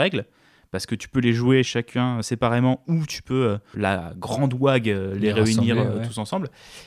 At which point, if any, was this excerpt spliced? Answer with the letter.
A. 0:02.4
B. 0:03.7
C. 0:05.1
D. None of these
B